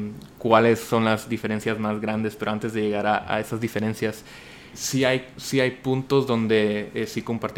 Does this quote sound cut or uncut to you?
cut